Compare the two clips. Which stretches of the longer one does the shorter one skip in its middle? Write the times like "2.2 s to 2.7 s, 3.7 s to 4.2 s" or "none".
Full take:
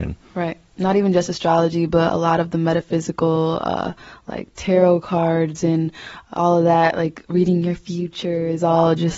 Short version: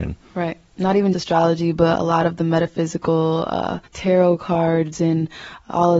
1.1 s to 1.3 s, 4.0 s to 4.5 s